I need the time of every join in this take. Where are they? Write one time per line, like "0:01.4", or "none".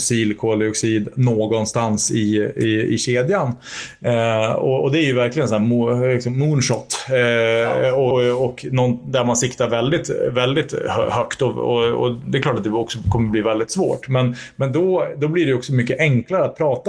0:08.1

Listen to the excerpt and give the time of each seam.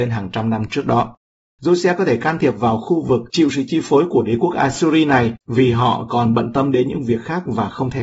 0:01.5
0:05.4

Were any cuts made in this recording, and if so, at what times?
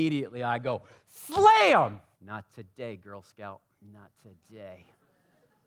0:02.1

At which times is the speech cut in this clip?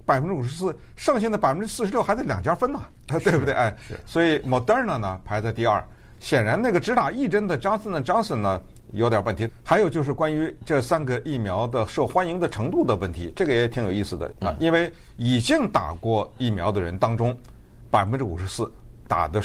0:09.5
0:14.3

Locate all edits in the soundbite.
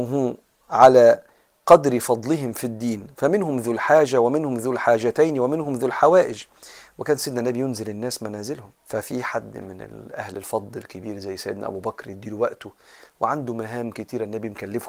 0:08.8

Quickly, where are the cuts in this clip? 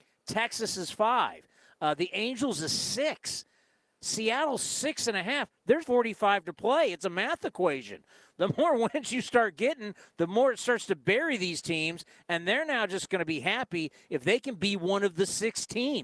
0:05.8

